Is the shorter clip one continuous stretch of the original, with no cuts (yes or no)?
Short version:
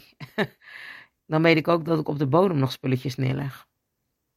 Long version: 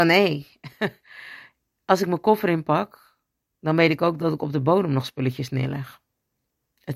no